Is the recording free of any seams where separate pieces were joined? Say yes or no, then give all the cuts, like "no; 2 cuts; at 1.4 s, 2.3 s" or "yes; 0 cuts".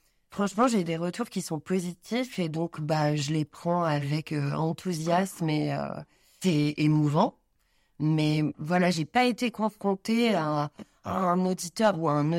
yes; 0 cuts